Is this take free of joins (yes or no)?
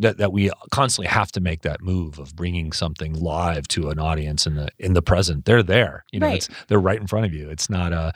no